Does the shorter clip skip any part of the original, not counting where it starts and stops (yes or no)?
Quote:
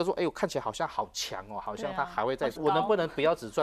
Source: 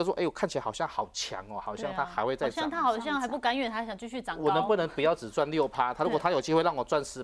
yes